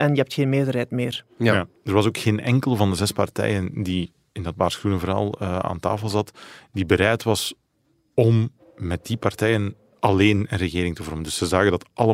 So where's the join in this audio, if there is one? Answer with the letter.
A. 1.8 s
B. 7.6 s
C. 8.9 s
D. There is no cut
D